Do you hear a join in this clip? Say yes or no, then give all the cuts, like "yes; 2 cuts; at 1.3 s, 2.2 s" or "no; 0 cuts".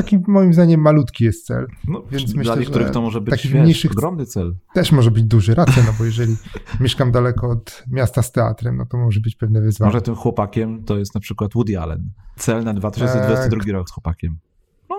yes; 2 cuts; at 12.4 s, 13.9 s